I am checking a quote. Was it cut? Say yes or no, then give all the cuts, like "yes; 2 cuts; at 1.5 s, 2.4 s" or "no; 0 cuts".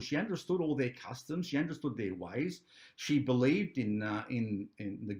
no; 0 cuts